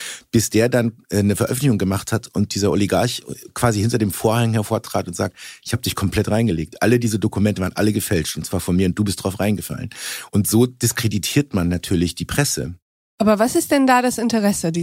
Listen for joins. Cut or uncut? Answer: uncut